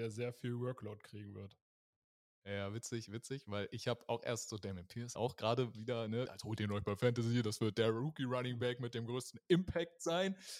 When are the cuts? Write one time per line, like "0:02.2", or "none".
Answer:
0:05.2
0:06.3